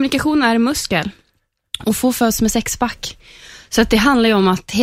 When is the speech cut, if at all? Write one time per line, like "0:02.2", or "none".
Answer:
none